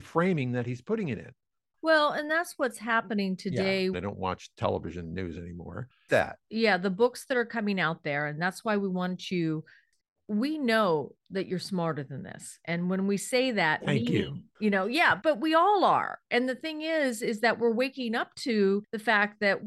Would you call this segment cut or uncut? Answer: cut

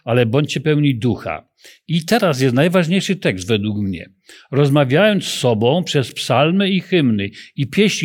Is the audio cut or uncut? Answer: uncut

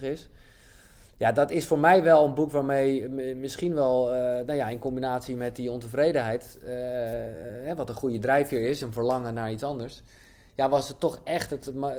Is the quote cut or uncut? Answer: uncut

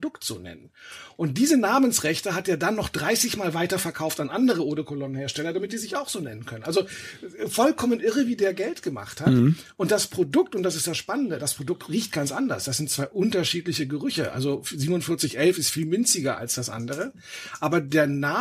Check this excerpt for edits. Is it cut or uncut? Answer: uncut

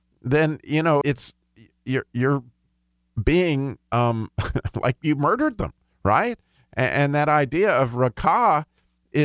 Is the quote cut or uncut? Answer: cut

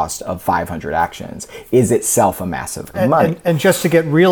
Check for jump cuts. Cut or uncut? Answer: cut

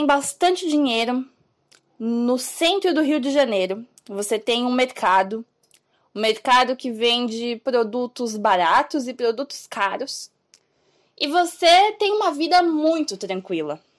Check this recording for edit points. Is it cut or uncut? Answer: uncut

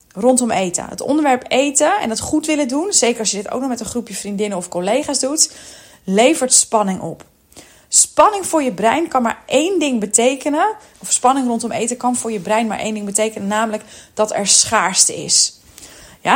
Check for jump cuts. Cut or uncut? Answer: cut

